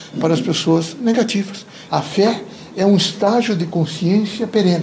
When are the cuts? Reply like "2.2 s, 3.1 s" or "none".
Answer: 1.9 s